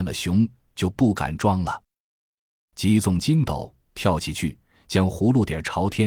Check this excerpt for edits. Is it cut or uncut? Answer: cut